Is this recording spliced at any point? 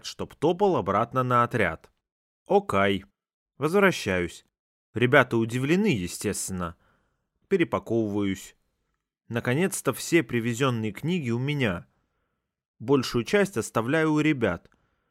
no; 0 cuts

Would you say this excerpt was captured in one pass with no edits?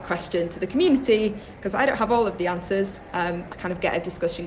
no; 1 cut; at 3.5 s

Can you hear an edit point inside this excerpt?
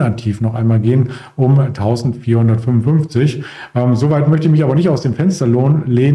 no; 0 cuts

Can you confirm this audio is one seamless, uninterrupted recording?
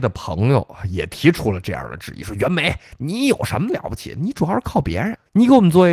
yes; 0 cuts

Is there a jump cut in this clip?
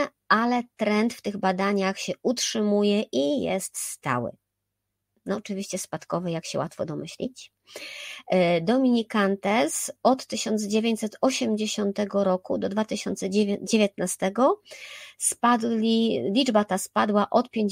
no; 0 cuts

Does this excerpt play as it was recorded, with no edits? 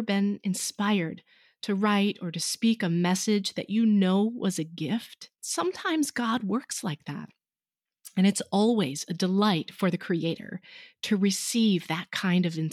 no; 1 cut; at 5.3 s

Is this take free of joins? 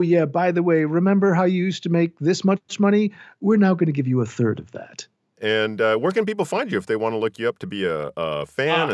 no; 1 cut; at 5.3 s

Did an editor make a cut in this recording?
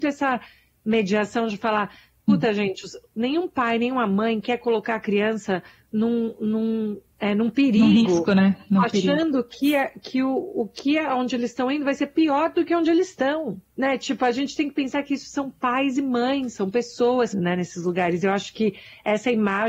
yes; 1 cut; at 17.3 s

